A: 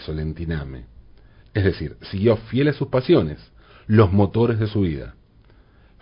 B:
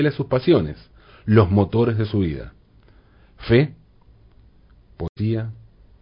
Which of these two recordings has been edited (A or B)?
A